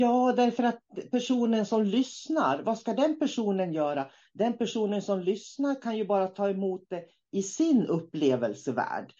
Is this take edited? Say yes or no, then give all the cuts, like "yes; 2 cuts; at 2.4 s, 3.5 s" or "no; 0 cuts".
no; 0 cuts